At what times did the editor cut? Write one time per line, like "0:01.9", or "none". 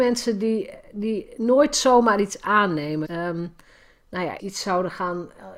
0:03.0
0:04.4